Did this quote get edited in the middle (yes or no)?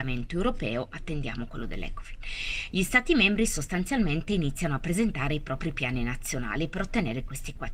no